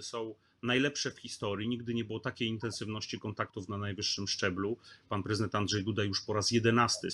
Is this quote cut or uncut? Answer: uncut